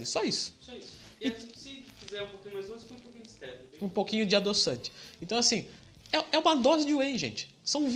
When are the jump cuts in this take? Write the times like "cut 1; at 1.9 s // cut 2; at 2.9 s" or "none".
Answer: none